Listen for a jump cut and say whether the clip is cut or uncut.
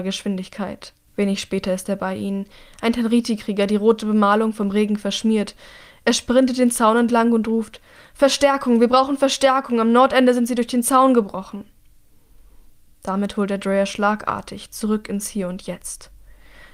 cut